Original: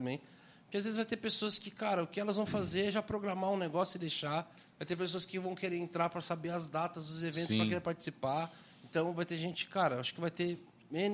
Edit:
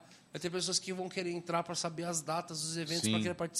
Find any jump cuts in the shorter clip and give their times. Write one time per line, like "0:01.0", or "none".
none